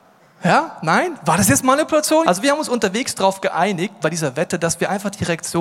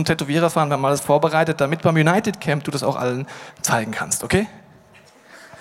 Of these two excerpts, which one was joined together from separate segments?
first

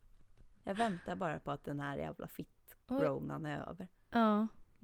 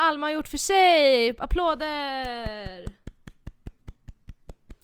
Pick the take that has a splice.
first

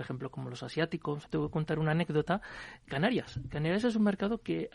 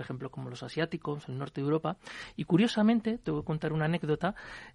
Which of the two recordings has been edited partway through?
first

